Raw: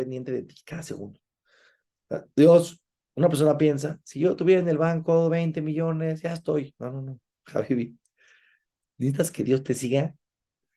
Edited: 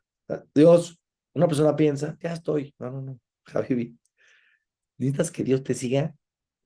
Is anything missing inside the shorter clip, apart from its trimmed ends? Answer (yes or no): yes